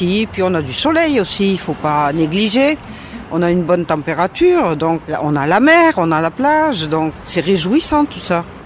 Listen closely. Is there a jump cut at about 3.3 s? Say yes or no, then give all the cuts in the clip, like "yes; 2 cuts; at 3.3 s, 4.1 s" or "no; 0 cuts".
no; 0 cuts